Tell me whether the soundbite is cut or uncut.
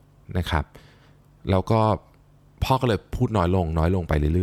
uncut